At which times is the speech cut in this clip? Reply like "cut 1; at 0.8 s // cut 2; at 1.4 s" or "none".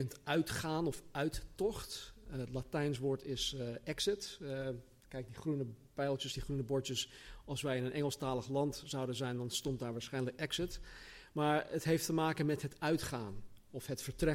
none